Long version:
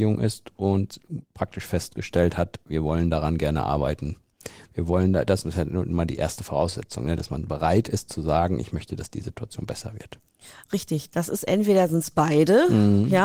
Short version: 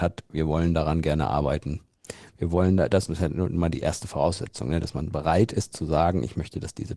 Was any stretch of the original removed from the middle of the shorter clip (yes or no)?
no